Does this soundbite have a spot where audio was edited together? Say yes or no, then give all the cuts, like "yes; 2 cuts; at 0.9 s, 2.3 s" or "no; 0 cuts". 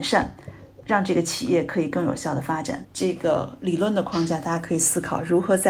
yes; 1 cut; at 2.8 s